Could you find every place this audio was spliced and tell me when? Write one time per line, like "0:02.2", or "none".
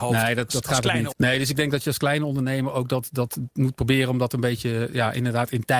0:01.1